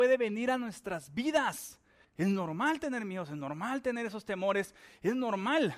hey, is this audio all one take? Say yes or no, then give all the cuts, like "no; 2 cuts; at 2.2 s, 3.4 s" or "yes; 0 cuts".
no; 1 cut; at 2.0 s